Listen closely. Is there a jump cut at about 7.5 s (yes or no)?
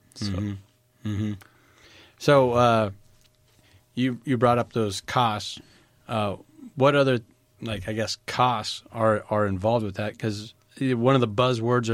no